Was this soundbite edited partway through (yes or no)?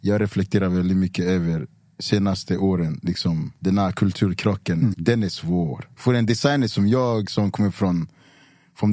yes